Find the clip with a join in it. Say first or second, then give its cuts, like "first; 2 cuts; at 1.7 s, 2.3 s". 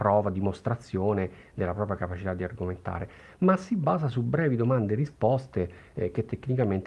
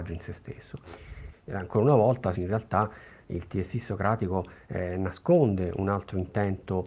second; 2 cuts; at 1.3 s, 2.3 s